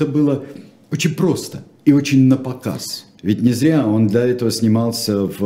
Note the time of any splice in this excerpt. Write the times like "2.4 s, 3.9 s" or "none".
3.2 s